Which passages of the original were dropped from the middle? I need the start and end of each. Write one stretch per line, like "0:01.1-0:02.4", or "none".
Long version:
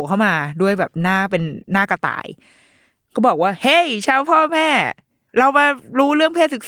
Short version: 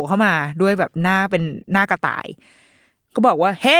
none